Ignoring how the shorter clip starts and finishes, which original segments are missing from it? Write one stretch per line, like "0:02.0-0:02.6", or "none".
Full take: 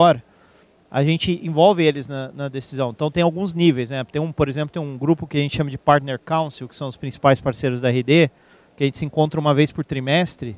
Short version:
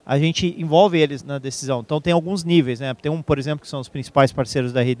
0:02.1-0:02.3
0:04.7-0:06.7